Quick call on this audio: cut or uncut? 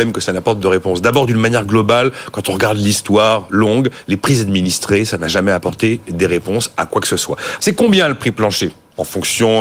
cut